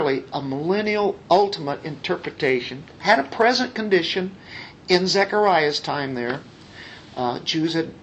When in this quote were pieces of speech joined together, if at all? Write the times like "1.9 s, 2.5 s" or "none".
none